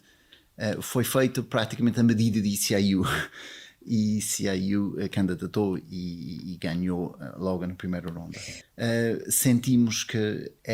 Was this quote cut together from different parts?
yes; 1 cut; at 8.6 s

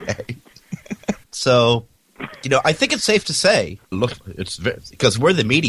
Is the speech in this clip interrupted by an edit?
yes; 2 cuts; at 1.2 s, 3.9 s

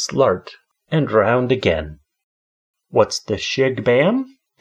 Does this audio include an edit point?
no; 0 cuts

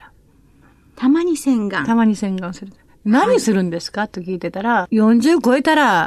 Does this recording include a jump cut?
yes; 1 cut; at 4.8 s

